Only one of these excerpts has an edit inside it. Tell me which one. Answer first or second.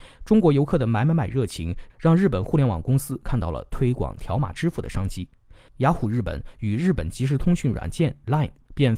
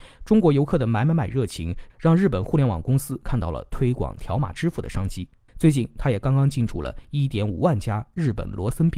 second